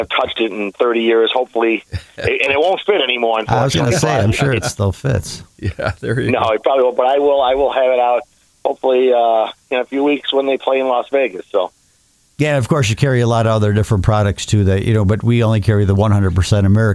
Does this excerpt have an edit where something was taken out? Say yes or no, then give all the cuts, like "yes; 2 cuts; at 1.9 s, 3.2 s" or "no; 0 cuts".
no; 0 cuts